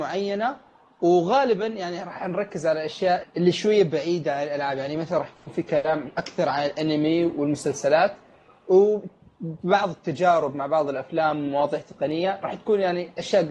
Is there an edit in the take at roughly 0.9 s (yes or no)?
no